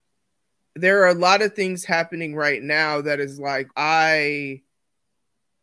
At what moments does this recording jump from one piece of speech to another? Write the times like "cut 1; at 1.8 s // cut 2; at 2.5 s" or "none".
cut 1; at 3.7 s